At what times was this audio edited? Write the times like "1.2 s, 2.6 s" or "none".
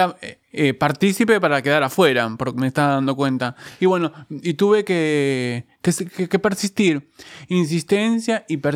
none